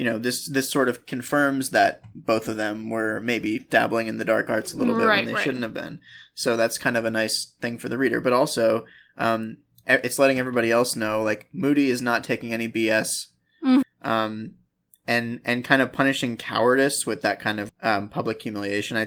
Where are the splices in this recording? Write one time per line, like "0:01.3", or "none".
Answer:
0:13.8
0:17.7